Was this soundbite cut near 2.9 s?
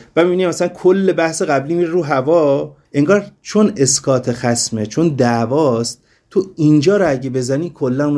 yes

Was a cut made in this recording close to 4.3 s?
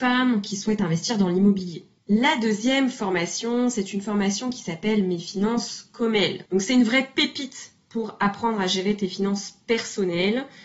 no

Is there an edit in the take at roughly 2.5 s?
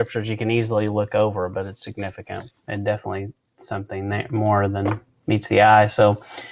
yes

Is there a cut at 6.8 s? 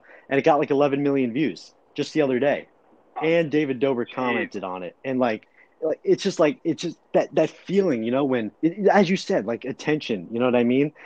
no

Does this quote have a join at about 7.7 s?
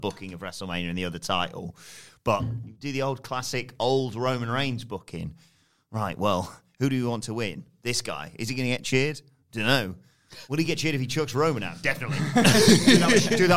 no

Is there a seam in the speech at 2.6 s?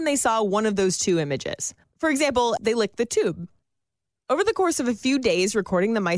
yes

